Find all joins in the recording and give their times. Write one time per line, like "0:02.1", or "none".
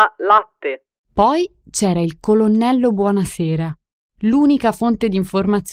0:01.0